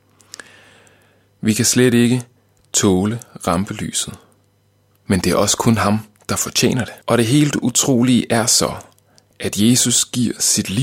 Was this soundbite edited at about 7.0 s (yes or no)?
yes